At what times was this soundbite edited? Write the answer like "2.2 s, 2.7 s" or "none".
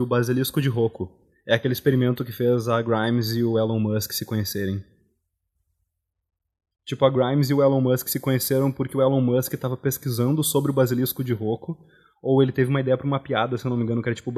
none